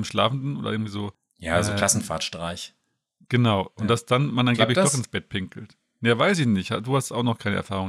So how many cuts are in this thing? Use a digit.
0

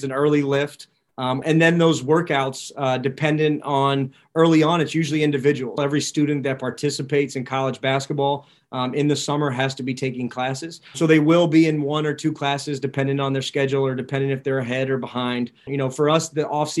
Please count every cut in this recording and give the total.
3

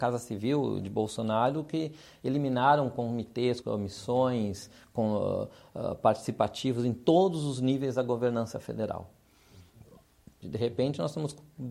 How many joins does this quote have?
2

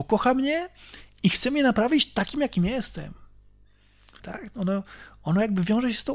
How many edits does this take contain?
1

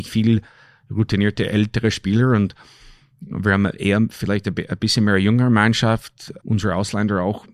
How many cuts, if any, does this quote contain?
1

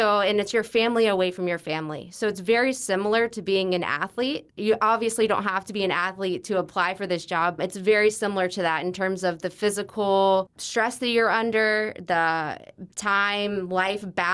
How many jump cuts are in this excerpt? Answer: 3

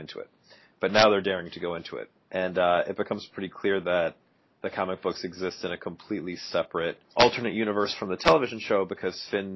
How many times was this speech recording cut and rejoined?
2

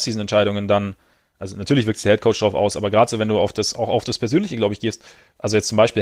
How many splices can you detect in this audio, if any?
0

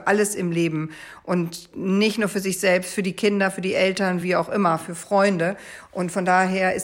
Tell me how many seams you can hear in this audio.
0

